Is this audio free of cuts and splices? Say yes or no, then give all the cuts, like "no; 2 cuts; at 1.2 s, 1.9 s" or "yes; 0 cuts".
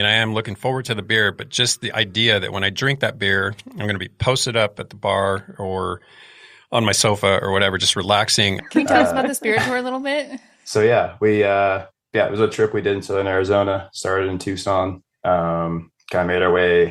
no; 1 cut; at 8.6 s